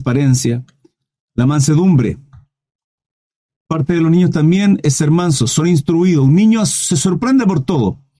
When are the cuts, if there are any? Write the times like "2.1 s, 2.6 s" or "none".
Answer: none

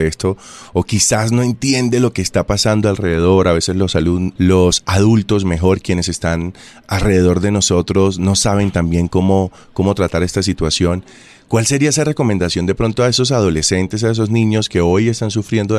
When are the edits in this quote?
none

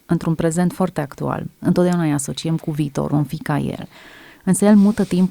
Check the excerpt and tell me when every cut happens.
1.6 s, 3.1 s

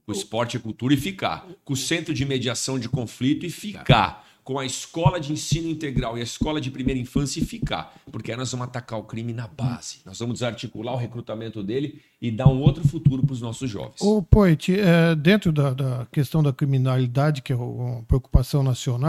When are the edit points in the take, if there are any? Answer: none

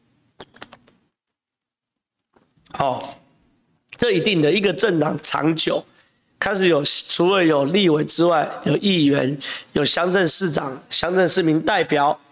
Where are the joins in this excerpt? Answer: none

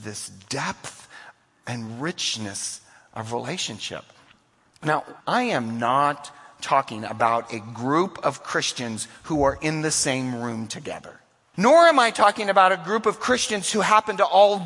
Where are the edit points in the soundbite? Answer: 5.2 s, 11.5 s

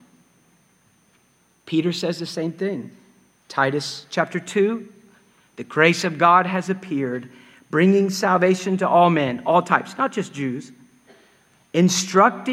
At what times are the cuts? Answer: 3.4 s

